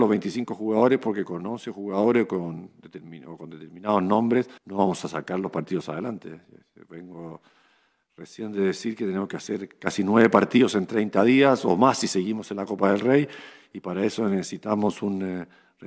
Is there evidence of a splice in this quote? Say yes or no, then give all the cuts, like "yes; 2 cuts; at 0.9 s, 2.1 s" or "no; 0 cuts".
yes; 1 cut; at 4.6 s